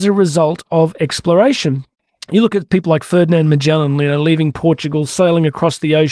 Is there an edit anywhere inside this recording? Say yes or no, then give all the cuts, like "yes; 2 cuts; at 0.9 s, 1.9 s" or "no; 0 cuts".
no; 0 cuts